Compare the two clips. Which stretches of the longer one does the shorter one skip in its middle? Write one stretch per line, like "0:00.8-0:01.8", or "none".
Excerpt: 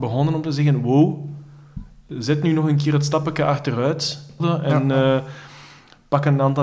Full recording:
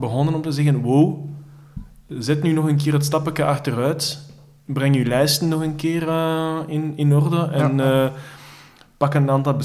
0:04.4-0:07.3